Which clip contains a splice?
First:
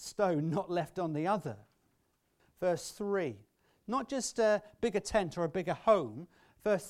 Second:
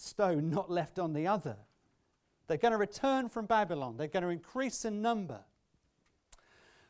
first; 1 cut; at 2.4 s

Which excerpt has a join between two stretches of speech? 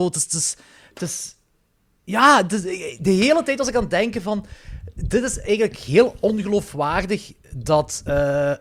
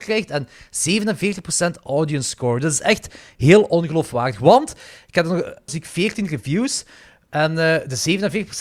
second; 1 cut; at 5.7 s

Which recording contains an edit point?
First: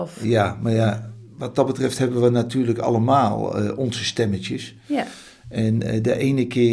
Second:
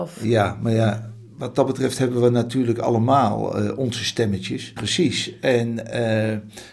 second; 1 cut; at 4.8 s

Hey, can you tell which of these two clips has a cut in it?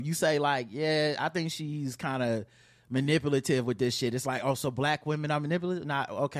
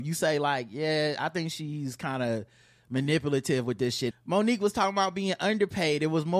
second; 1 cut; at 4.1 s

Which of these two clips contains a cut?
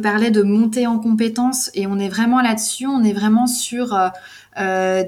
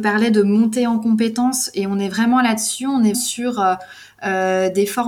second; 1 cut; at 3.1 s

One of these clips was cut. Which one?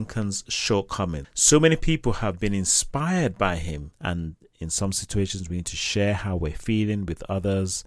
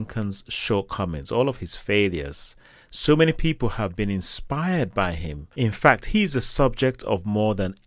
first; 2 cuts; at 1.2 s, 3.9 s

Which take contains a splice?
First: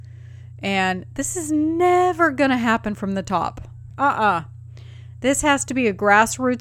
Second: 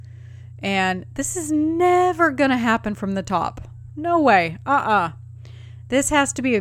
first; 1 cut; at 3.9 s

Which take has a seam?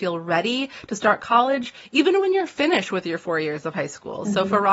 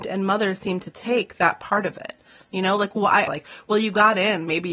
second; 1 cut; at 3.3 s

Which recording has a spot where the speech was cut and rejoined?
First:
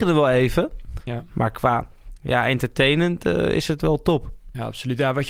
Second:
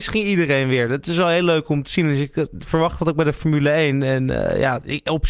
first; 1 cut; at 1.0 s

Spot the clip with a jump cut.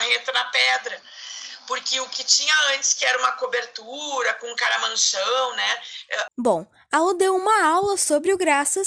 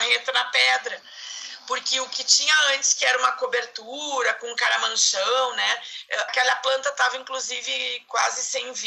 first; 1 cut; at 6.3 s

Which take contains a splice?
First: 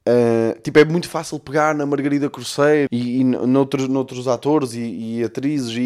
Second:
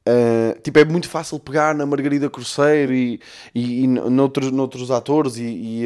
first; 1 cut; at 2.9 s

